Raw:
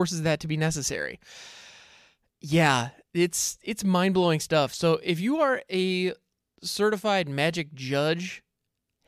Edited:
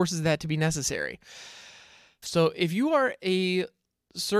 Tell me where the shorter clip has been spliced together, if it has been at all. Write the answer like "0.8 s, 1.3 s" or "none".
2.2 s